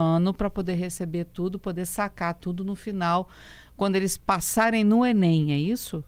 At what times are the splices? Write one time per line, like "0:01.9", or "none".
none